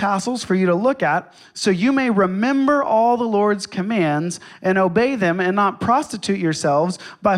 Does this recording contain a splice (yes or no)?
no